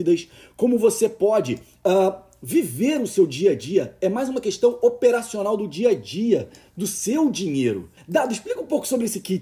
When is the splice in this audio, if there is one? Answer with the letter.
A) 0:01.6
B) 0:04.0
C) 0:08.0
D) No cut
C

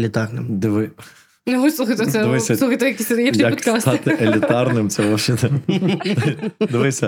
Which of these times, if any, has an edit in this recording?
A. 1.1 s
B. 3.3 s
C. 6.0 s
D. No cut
B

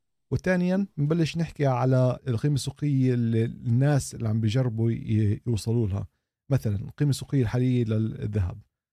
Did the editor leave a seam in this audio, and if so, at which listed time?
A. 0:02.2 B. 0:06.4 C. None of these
A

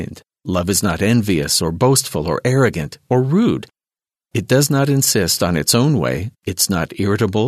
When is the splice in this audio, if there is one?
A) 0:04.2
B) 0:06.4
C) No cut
B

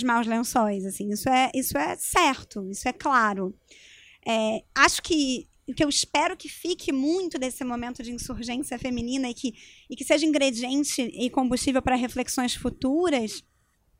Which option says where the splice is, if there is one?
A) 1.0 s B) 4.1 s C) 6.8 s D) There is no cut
D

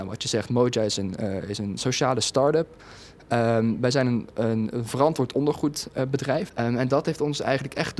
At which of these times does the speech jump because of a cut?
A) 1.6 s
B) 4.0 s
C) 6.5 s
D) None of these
C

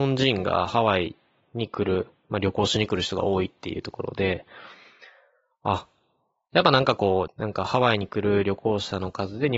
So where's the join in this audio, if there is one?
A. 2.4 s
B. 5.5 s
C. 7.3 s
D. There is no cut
C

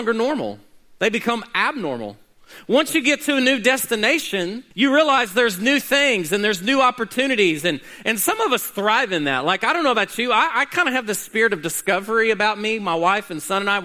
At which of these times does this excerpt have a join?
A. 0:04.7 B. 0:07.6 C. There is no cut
A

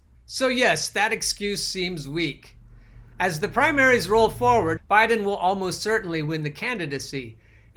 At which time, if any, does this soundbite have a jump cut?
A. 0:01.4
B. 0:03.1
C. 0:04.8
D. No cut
C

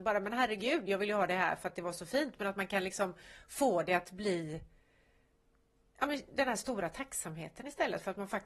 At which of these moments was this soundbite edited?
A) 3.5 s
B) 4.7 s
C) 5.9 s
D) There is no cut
D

